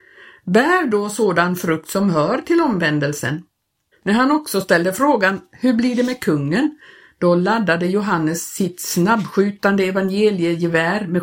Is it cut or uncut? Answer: cut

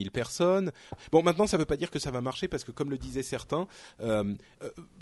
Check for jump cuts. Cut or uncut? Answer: cut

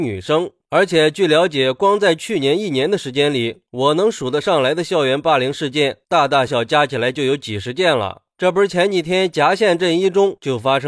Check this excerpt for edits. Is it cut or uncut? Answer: cut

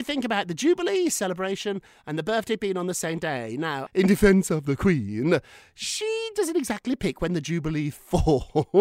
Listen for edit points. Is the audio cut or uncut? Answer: cut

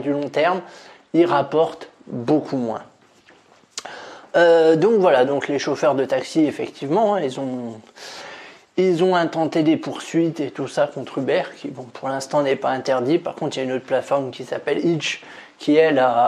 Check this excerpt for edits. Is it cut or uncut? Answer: uncut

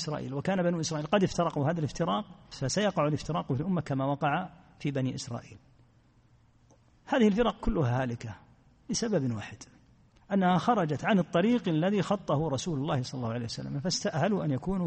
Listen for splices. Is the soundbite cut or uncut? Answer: cut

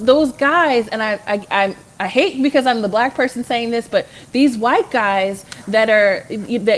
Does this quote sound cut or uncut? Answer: uncut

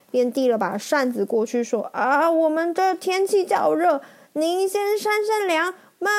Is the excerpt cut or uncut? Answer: uncut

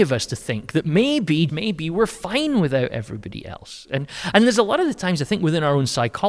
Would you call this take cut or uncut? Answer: cut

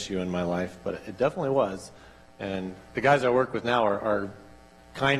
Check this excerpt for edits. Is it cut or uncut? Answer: uncut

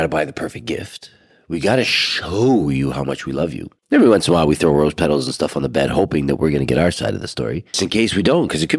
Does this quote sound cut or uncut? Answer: cut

